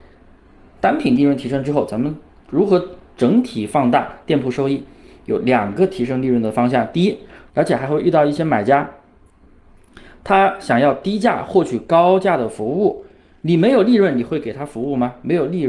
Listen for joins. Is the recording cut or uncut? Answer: cut